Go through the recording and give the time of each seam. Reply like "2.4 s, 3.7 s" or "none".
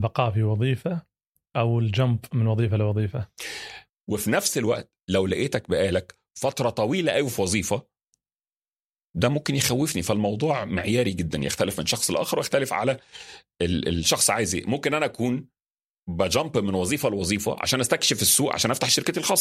3.9 s